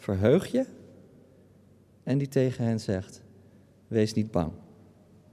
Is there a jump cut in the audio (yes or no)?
no